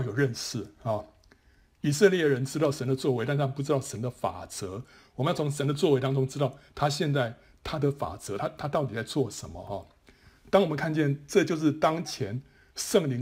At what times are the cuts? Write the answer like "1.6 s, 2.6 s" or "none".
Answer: none